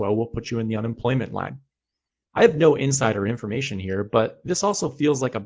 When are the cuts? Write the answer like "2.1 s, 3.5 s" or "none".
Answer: none